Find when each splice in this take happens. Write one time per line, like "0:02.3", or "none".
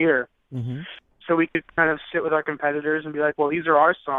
0:01.2